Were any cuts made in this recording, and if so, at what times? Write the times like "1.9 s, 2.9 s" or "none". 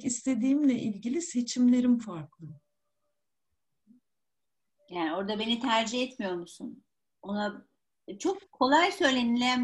none